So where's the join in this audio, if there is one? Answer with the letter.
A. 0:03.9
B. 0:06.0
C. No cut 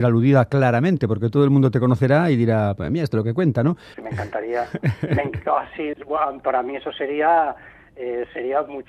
A